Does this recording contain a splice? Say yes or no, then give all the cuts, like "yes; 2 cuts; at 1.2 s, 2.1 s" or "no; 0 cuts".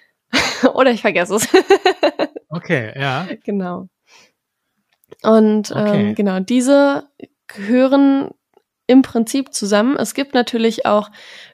no; 0 cuts